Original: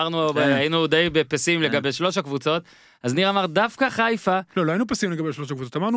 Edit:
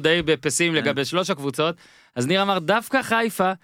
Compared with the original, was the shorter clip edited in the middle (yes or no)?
no